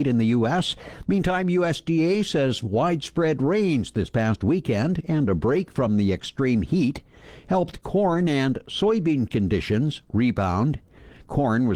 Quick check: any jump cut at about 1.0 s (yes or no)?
yes